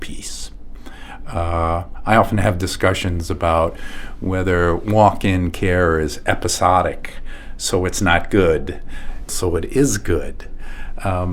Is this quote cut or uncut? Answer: cut